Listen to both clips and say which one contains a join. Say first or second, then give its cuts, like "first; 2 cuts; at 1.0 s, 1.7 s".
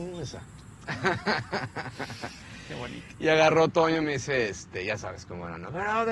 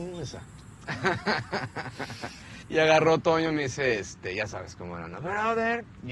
second; 1 cut; at 2.6 s